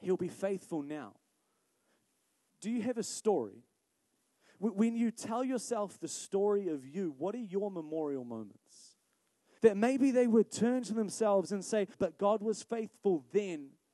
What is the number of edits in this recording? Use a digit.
2